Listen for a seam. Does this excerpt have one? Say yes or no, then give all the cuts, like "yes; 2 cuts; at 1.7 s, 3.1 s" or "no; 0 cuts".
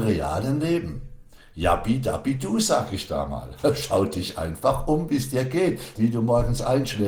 yes; 1 cut; at 6.0 s